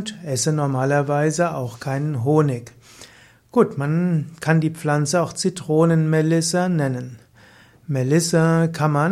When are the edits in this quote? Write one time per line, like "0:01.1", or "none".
none